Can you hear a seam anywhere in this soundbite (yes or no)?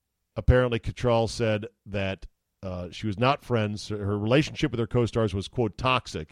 no